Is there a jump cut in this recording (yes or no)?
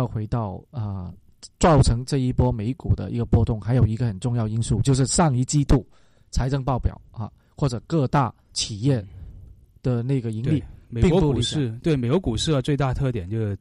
no